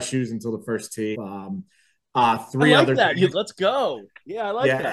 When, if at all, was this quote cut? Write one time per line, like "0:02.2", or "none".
0:01.1
0:03.3